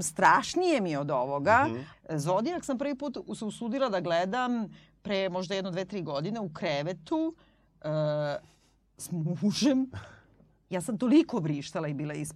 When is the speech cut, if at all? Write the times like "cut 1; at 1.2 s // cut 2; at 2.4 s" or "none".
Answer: cut 1; at 1.9 s